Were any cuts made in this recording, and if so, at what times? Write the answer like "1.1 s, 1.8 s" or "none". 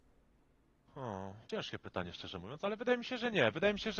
1.4 s